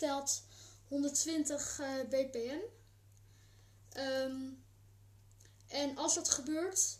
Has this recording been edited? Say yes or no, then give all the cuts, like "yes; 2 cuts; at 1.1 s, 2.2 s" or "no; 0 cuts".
no; 0 cuts